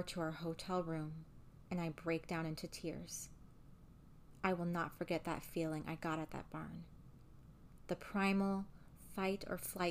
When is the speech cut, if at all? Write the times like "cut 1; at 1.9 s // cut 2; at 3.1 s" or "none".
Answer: none